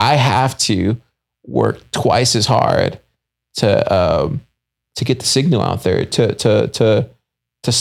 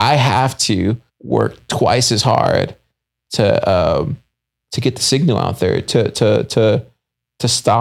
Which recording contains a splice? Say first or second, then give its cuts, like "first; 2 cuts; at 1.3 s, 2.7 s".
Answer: second; 1 cut; at 1.1 s